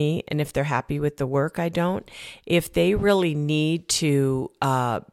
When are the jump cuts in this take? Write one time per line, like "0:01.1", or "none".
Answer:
none